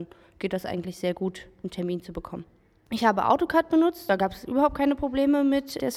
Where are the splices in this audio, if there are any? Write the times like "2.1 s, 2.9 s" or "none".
none